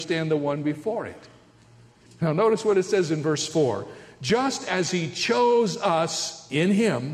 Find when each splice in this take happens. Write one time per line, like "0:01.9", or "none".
0:02.1